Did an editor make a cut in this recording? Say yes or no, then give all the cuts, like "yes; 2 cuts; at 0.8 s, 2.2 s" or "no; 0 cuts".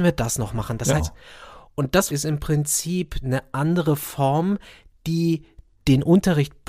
yes; 2 cuts; at 1.0 s, 2.1 s